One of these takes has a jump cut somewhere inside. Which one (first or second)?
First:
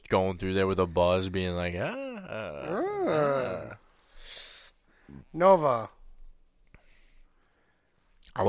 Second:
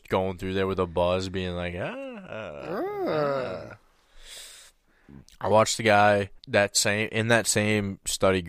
second